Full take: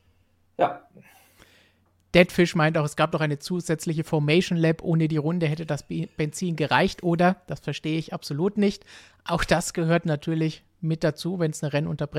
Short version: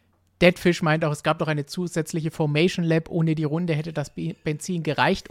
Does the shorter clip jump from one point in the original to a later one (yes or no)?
no